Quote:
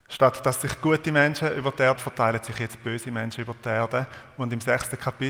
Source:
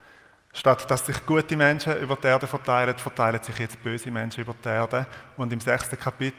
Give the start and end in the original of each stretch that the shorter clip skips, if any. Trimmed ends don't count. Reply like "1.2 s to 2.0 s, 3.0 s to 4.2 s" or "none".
2.4 s to 3.0 s